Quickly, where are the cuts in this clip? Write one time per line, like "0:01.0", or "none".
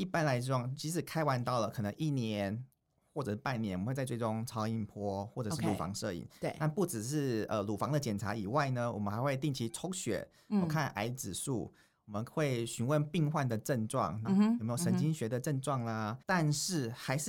0:14.2
0:16.2